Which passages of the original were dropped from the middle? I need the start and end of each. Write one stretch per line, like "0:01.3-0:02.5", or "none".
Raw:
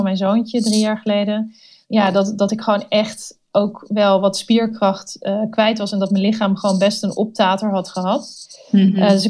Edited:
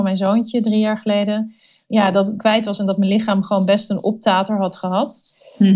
0:02.4-0:05.5